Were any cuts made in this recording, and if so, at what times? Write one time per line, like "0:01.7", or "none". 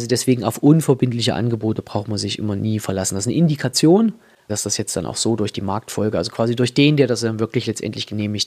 0:04.5